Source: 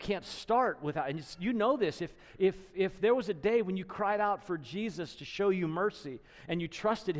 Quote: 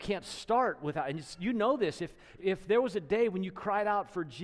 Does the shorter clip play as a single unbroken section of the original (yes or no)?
no